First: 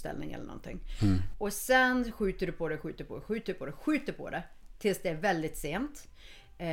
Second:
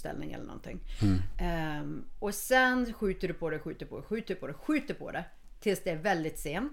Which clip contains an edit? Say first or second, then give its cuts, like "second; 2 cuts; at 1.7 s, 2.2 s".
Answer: first; 1 cut; at 1.3 s